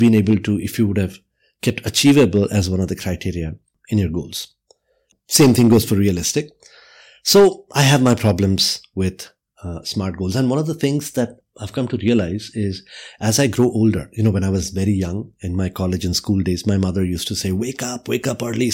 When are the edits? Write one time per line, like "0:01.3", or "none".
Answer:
none